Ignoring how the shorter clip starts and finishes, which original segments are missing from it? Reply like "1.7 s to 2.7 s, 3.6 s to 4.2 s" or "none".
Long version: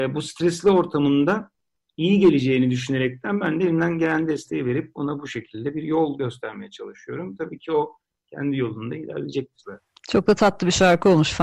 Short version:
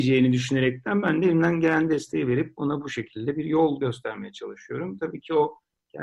none